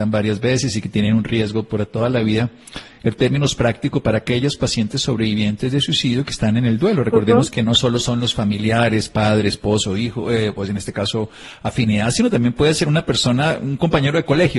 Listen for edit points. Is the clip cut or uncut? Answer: uncut